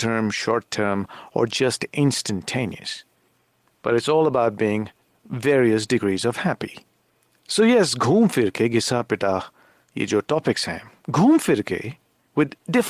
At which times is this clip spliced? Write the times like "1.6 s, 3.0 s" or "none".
none